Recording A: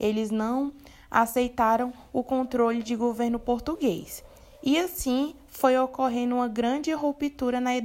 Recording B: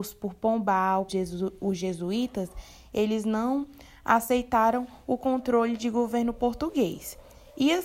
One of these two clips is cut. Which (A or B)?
B